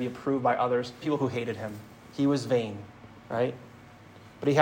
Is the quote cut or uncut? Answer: cut